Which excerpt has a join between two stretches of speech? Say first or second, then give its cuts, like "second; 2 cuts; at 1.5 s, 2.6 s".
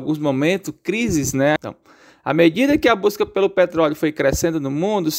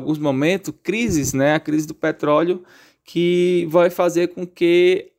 first; 1 cut; at 1.6 s